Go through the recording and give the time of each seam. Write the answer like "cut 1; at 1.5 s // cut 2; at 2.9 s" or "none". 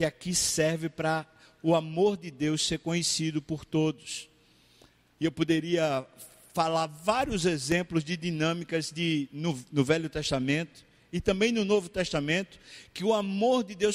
none